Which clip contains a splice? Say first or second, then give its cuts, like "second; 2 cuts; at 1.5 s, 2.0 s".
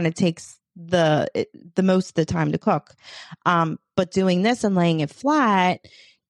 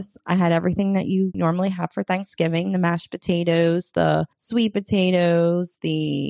second; 2 cuts; at 1.3 s, 4.3 s